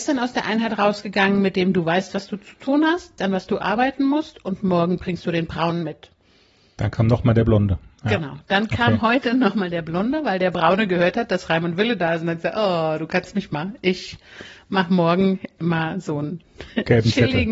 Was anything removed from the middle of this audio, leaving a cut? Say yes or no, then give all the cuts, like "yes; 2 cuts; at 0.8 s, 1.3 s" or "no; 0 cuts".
yes; 1 cut; at 3.2 s